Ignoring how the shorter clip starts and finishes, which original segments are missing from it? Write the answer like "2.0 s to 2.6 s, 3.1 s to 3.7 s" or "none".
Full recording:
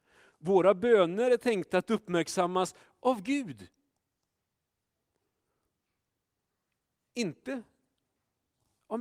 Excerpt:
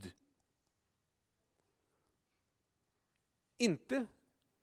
none